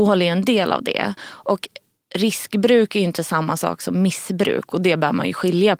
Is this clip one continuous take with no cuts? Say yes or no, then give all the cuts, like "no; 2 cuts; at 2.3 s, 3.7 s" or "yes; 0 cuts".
yes; 0 cuts